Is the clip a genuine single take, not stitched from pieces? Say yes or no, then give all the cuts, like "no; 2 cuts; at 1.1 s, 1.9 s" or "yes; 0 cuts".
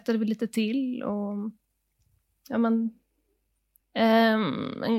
no; 1 cut; at 3.8 s